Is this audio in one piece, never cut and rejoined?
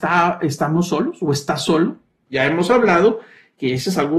no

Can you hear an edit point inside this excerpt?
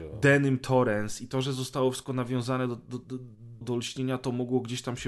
yes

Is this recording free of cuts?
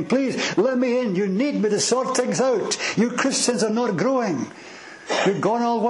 yes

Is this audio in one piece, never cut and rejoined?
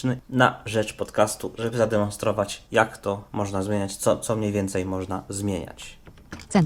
yes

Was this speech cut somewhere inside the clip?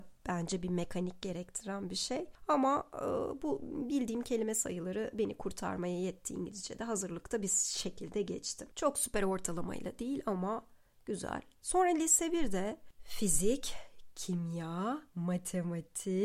yes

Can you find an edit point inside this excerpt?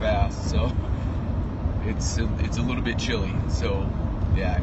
no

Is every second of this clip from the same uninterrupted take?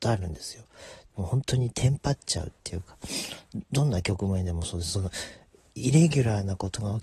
no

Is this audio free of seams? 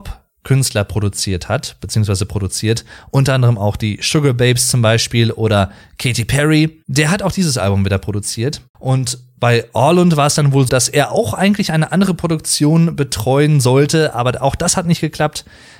no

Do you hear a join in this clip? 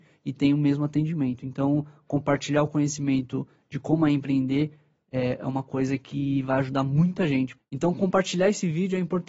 yes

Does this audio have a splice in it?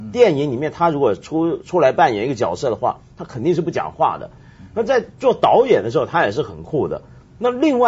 no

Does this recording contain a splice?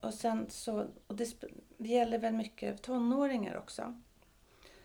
no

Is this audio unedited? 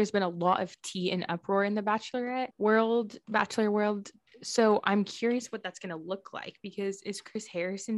yes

